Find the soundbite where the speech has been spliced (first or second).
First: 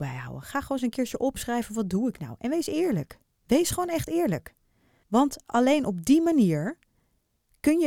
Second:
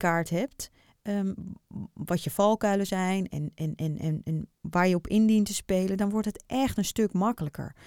first